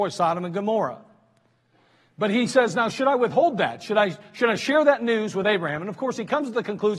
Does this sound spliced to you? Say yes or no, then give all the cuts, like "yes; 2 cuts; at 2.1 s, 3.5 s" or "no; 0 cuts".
no; 0 cuts